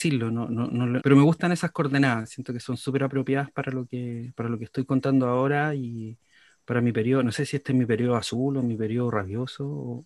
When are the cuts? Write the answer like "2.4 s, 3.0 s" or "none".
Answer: 1.0 s